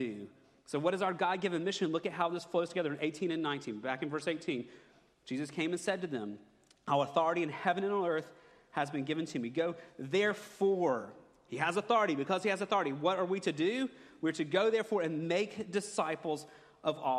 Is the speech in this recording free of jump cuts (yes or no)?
yes